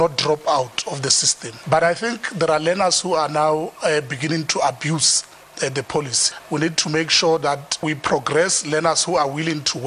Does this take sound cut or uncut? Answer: uncut